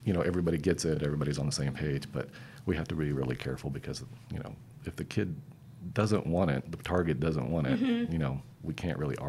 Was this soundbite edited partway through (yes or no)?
no